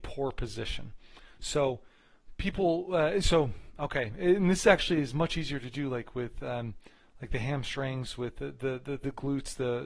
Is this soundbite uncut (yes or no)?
yes